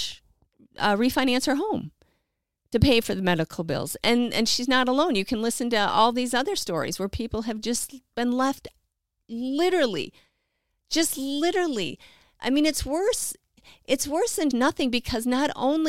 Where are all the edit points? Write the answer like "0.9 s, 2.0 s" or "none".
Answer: 14.5 s